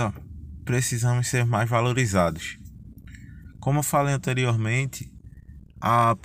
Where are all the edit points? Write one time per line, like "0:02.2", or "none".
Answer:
none